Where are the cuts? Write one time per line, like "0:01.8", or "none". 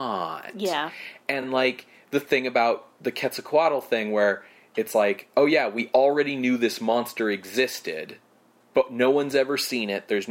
none